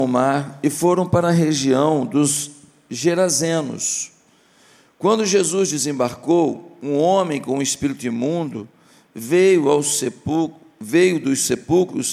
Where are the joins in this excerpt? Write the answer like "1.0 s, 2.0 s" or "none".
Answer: none